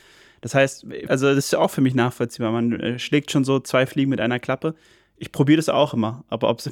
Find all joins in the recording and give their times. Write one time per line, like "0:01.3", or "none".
0:01.1